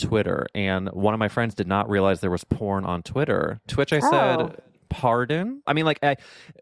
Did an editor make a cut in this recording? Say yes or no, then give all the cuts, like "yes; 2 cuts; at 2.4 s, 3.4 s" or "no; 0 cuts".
yes; 1 cut; at 5.6 s